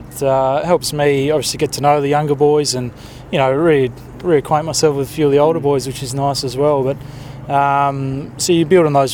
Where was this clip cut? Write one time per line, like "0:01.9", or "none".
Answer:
none